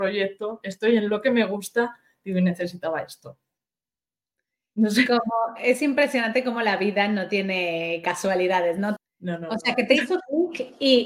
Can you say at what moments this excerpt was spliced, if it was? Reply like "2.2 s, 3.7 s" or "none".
9.0 s